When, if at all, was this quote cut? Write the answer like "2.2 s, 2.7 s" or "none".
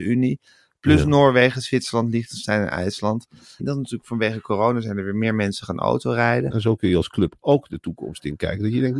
3.6 s, 6.5 s